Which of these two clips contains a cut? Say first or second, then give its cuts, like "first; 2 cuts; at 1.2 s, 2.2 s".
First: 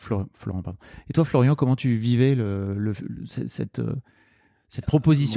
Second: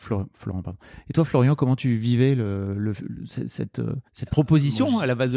second; 1 cut; at 4.1 s